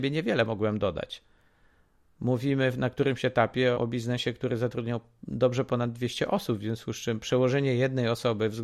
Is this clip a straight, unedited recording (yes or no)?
no